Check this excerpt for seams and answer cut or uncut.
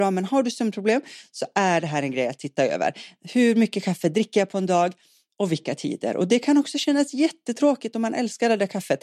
uncut